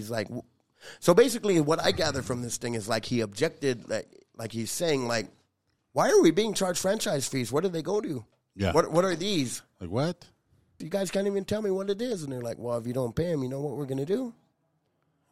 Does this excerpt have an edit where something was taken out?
yes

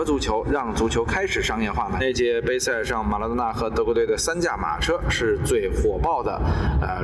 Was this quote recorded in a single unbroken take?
no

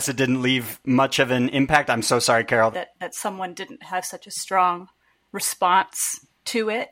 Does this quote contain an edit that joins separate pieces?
yes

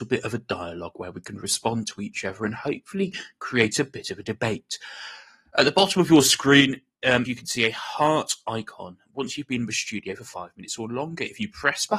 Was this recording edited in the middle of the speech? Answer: yes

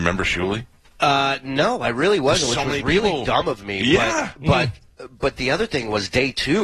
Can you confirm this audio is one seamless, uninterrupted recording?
yes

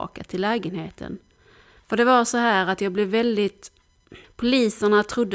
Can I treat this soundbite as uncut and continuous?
no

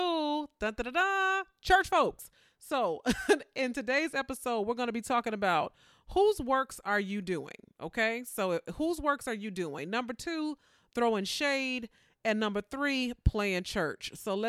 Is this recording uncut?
yes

